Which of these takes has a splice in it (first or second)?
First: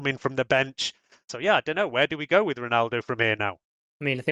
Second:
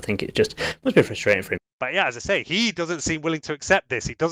second